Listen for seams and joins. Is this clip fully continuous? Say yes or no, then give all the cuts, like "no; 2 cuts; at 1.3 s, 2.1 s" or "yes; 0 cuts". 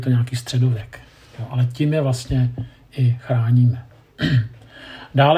yes; 0 cuts